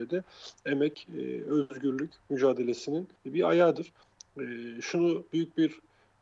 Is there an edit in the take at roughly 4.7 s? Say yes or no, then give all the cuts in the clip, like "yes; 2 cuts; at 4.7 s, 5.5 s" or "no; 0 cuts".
no; 1 cut; at 3.2 s